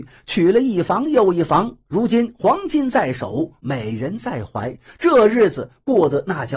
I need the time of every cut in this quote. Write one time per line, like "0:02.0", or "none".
none